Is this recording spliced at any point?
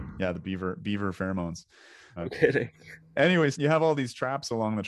yes; 2 cuts; at 2.2 s, 3.5 s

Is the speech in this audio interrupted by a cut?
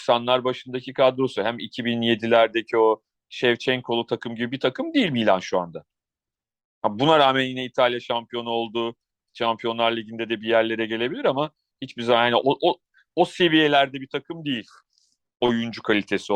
no; 0 cuts

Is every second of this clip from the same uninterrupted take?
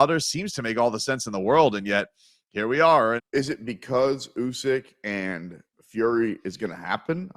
no; 1 cut; at 3.2 s

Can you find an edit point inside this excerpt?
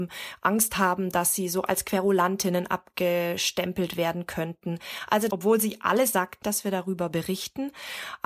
yes; 2 cuts; at 5.3 s, 6.4 s

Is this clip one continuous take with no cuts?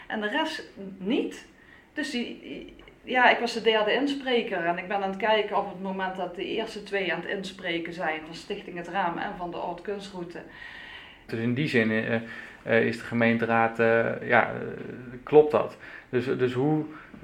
no; 1 cut; at 11.3 s

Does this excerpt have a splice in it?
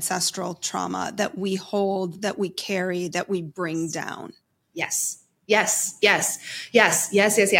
no; 0 cuts

